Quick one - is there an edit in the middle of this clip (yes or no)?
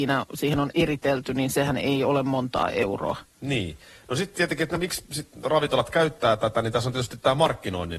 no